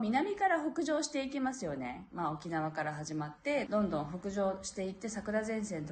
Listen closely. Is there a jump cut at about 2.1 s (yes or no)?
no